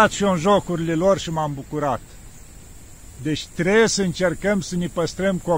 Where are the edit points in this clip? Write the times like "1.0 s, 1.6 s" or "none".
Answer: none